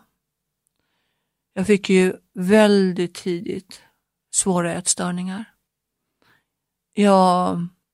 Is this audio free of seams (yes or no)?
yes